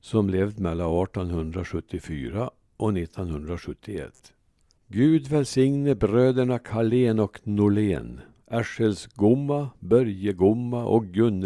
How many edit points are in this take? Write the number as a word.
one